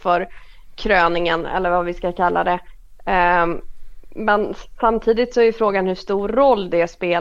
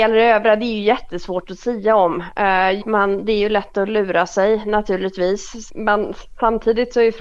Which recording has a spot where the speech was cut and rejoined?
second; 2 cuts; at 2.8 s, 5.7 s

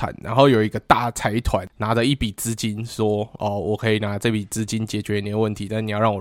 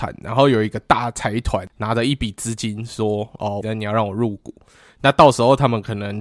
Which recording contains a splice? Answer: second; 1 cut; at 3.6 s

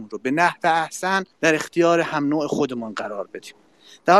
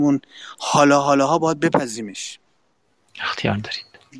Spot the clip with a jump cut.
first; 1 cut; at 1.3 s

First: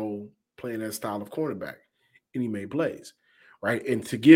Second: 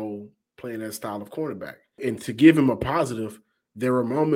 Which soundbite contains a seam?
second; 1 cut; at 2.0 s

